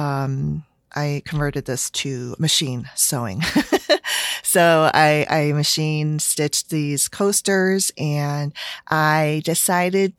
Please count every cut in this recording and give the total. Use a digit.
1